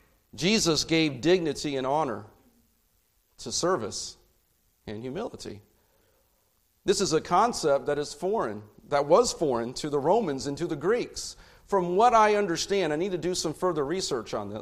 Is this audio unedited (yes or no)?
yes